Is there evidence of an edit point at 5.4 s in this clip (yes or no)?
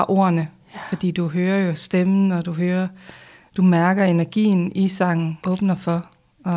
yes